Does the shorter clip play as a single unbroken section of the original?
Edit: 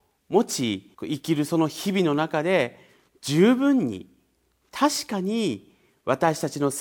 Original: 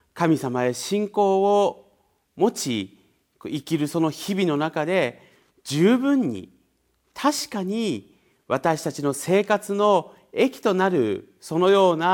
no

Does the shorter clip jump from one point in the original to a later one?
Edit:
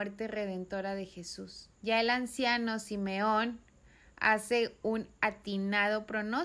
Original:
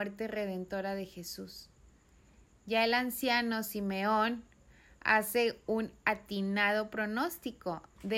yes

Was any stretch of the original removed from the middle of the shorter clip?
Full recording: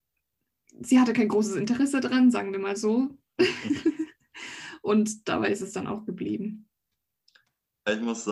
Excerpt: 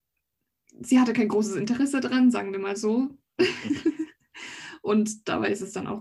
no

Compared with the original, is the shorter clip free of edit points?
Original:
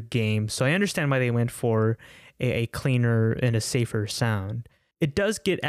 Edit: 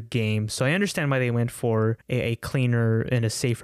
no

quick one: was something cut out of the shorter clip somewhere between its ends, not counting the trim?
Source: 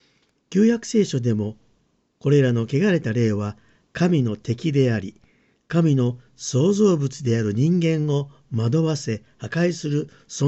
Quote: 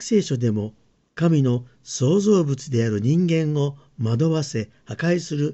yes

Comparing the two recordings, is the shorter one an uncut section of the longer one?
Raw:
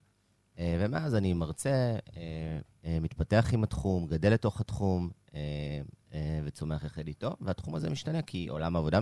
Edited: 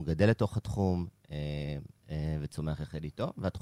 yes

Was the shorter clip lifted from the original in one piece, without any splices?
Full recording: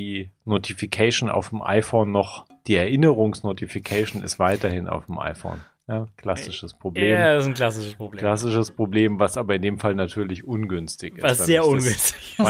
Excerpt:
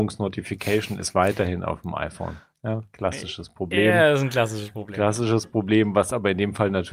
yes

